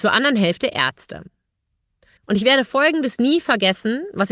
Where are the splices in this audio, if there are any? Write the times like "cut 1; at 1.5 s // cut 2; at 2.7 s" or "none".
cut 1; at 2.2 s